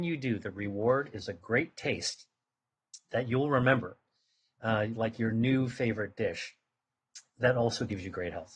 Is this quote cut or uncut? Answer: uncut